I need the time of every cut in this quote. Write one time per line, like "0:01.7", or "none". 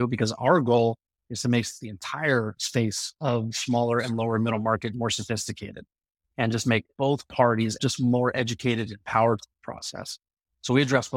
0:07.8